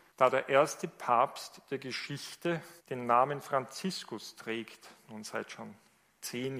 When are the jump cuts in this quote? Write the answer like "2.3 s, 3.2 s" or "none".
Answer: none